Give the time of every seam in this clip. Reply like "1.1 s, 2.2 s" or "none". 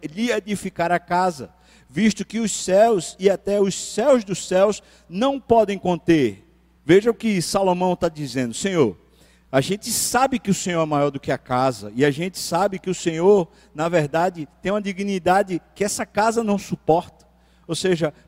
6.8 s